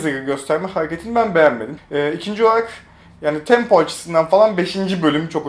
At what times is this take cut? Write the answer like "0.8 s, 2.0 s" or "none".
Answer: 1.8 s